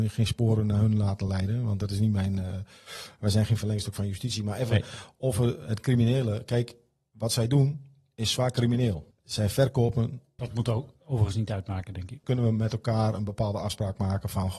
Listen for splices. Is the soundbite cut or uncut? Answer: cut